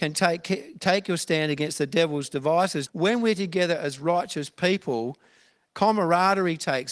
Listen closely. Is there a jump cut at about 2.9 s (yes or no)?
yes